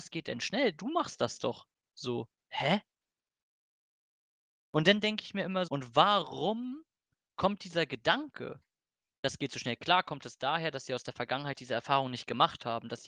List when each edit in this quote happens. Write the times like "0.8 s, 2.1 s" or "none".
5.7 s

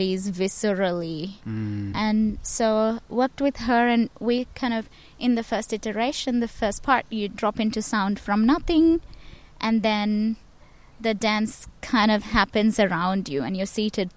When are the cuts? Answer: 1.9 s

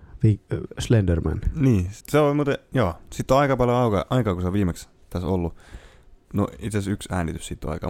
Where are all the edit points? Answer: 2.0 s

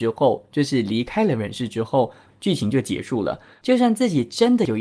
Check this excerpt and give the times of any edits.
3.6 s

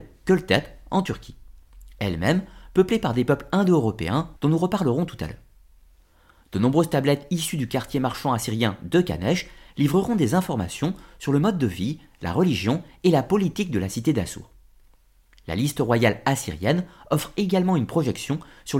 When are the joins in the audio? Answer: 4.4 s

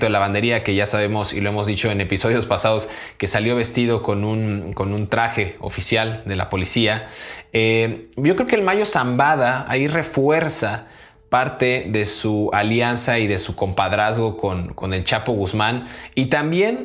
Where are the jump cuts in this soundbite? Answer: none

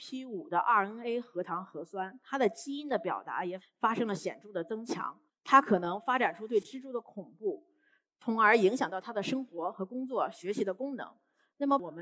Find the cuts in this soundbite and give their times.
3.6 s, 5.3 s

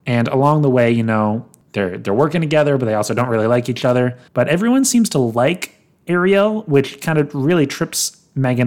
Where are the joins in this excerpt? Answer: 4.3 s

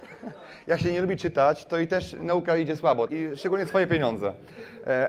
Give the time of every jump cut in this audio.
3.1 s

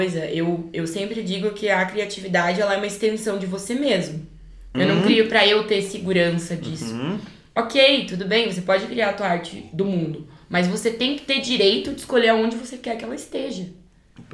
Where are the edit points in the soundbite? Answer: 4.7 s

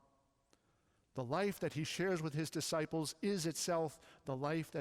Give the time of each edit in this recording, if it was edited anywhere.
none

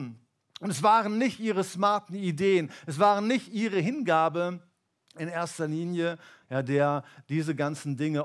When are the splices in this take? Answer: 6.4 s

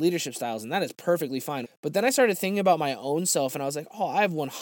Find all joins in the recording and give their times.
1.6 s

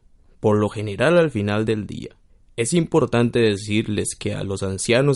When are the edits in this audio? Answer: none

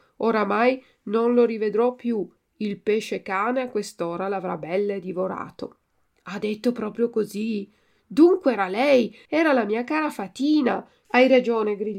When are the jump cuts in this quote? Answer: 9.3 s, 11.0 s

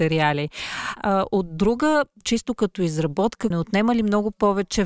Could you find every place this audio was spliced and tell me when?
1.0 s, 2.2 s, 3.5 s

